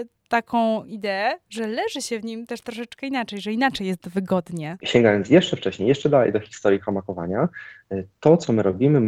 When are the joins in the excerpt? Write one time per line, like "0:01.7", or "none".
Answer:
0:04.8